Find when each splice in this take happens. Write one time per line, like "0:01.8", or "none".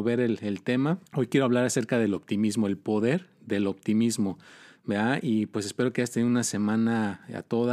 0:01.1